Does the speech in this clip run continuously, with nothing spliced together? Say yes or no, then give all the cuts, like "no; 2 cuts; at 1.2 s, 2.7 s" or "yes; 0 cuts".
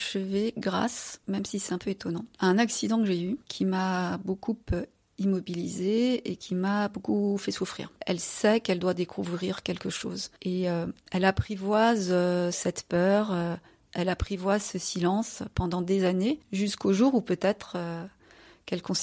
no; 1 cut; at 7.9 s